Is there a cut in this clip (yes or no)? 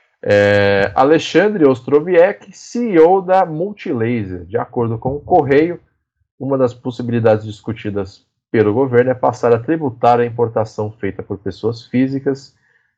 no